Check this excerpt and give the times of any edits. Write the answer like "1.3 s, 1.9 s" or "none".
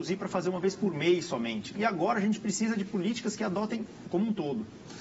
1.7 s, 4.1 s